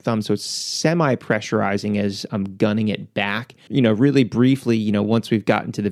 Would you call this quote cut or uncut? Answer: cut